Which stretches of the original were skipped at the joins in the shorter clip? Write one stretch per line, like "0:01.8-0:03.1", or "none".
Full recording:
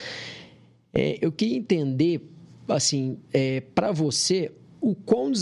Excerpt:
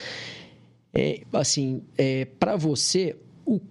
0:01.2-0:02.5

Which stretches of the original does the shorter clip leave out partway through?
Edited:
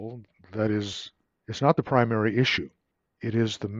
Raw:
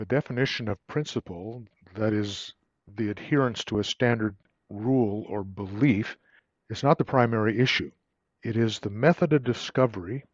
0:02.8-0:06.6

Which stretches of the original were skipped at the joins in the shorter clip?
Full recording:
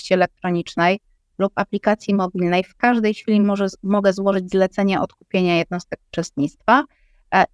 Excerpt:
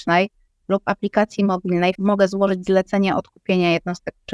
0:02.7-0:03.8

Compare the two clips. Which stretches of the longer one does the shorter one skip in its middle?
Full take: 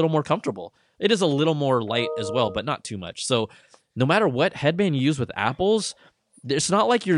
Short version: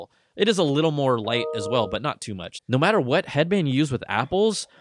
0:03.2-0:03.8

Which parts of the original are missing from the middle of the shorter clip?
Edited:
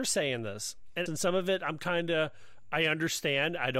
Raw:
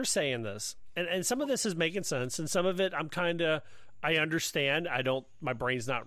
0:01.1-0:02.4

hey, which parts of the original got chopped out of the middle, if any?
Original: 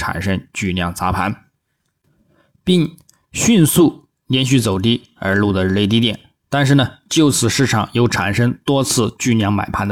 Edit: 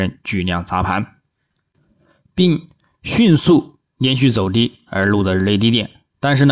none

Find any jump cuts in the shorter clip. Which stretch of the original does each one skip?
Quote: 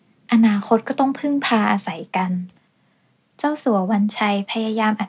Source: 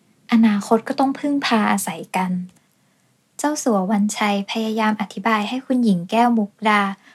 none

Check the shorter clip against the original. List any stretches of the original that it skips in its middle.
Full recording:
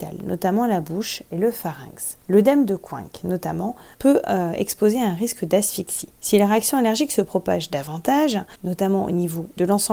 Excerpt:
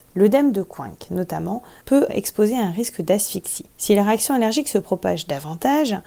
0:04.2-0:04.5

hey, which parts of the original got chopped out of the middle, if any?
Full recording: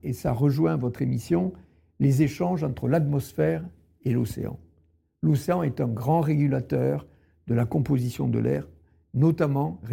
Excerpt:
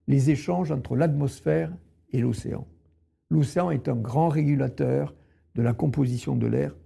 none

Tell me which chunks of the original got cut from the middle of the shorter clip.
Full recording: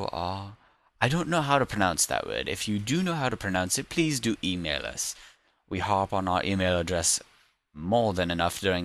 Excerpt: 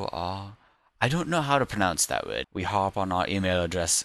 0:02.4-0:05.6

